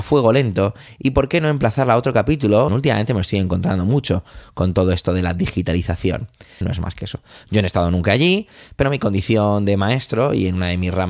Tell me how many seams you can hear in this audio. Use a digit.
3